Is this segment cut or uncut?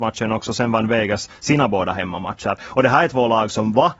uncut